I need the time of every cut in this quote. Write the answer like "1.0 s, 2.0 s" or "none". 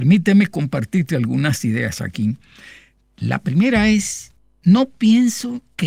none